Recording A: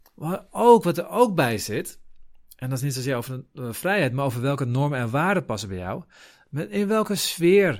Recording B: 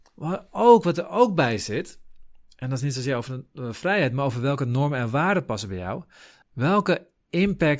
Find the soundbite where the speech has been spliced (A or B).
B